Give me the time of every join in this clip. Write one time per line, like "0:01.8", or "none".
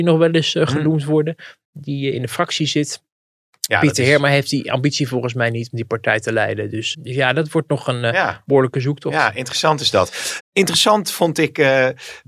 0:06.9
0:10.4